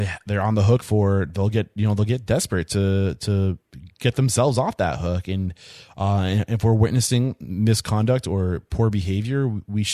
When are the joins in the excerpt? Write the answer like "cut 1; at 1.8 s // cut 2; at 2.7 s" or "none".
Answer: none